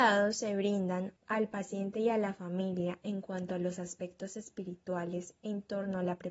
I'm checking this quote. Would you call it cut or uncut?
cut